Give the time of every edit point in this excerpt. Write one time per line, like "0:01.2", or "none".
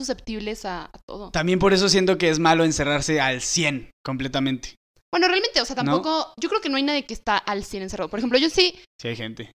none